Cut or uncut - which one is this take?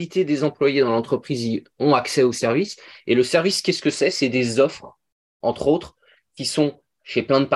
uncut